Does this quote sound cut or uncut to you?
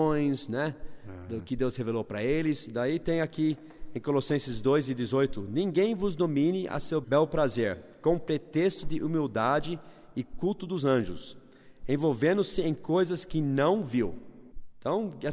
uncut